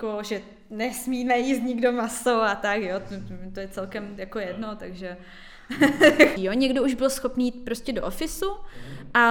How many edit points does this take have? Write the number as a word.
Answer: one